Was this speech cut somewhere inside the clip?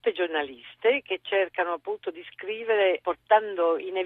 yes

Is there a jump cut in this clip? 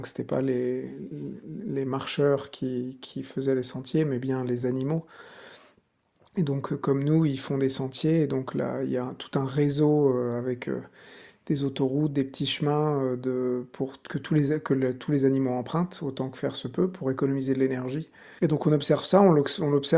yes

